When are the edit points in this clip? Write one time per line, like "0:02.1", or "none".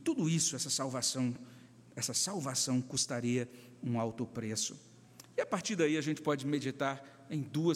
none

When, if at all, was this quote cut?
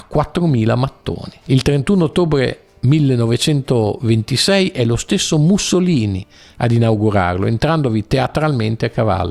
0:01.4

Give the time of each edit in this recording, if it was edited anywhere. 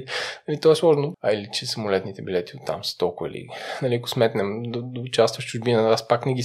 0:01.1

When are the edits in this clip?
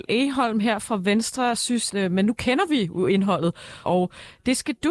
0:01.9
0:03.8

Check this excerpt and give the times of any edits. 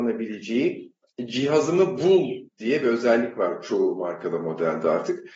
0:02.5

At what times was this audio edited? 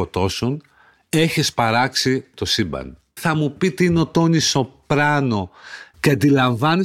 0:03.2
0:05.9

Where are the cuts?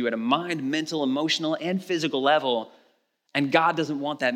none

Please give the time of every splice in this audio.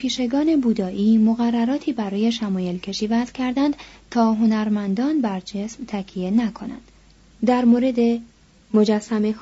0:07.3

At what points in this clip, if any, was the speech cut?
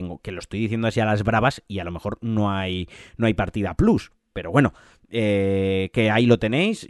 none

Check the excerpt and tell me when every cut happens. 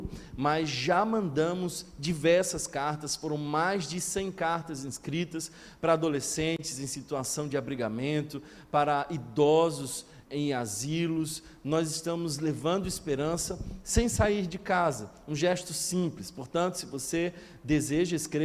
0:10.2

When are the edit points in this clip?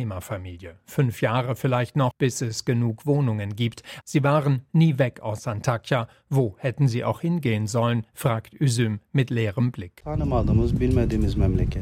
0:02.1
0:04.0

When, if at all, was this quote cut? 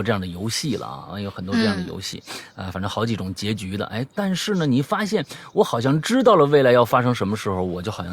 none

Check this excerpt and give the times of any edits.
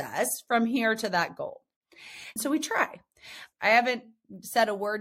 0:02.4
0:03.5

